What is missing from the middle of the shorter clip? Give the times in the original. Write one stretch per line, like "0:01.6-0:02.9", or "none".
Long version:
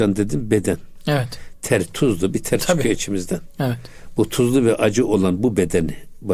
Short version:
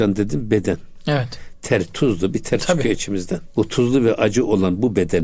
0:03.5-0:04.2